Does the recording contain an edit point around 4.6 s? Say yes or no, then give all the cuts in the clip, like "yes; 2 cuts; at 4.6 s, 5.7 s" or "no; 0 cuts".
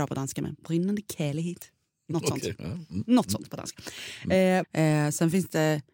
yes; 1 cut; at 4.6 s